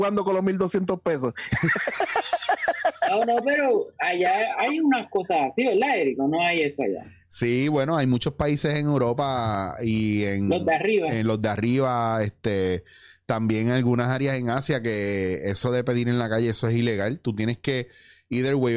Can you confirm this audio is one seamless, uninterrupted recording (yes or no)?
yes